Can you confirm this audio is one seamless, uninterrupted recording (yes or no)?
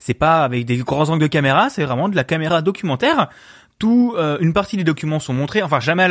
yes